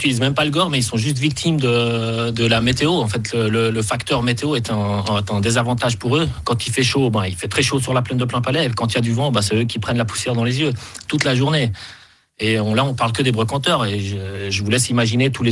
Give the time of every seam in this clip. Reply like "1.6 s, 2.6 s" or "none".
none